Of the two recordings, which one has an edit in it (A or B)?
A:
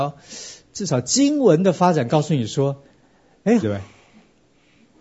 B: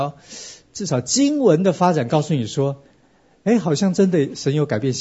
A